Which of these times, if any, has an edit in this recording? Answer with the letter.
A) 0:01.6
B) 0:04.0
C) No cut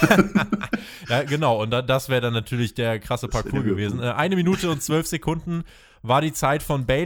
C